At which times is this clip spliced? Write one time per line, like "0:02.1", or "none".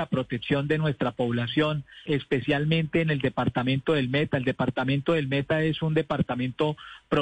0:02.1